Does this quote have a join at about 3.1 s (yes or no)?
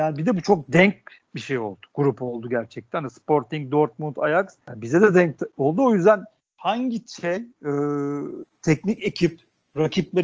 no